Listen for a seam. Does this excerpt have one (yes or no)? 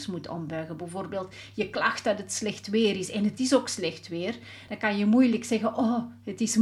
no